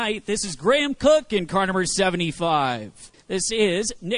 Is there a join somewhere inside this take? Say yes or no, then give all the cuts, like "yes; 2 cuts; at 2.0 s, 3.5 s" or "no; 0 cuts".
yes; 1 cut; at 3.1 s